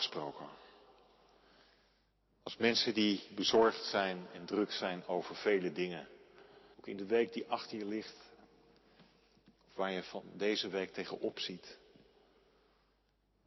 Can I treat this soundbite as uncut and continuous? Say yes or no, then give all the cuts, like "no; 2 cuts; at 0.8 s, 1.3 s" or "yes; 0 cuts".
no; 1 cut; at 6.7 s